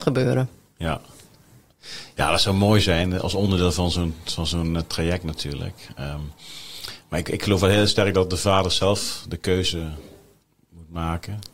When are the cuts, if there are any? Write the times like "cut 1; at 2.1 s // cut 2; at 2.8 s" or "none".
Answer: none